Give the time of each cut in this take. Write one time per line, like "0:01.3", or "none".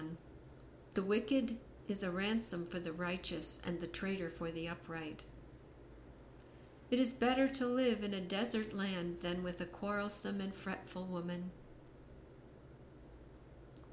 0:00.9